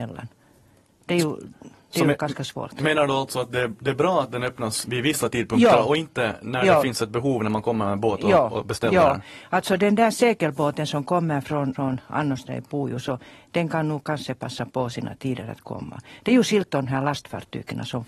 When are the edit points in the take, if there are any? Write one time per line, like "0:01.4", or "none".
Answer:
0:11.7